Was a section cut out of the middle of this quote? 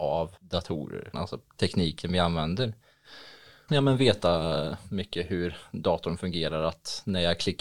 yes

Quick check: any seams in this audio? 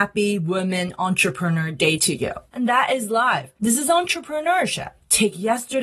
yes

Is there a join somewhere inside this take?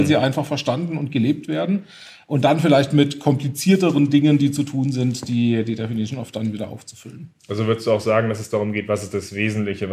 no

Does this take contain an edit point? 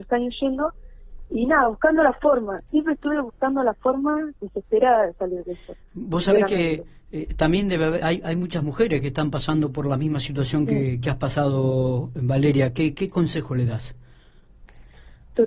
no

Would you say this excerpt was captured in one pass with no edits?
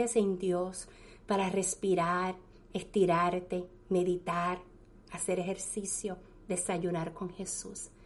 yes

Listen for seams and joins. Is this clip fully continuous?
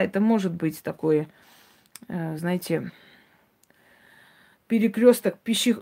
yes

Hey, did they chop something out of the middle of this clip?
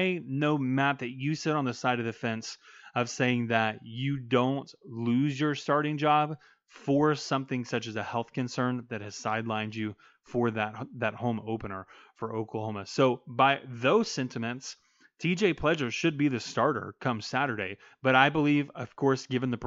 no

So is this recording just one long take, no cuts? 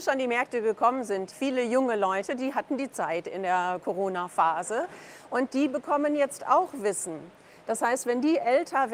no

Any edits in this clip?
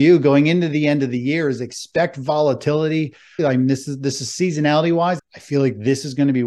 yes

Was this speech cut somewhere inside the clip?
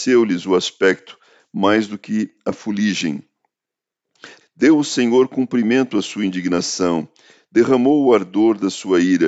yes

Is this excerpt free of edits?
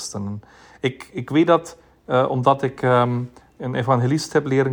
yes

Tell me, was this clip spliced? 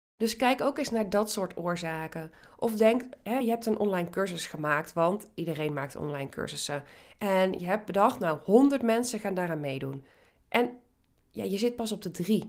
no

